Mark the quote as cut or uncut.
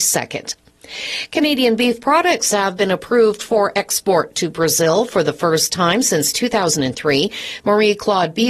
cut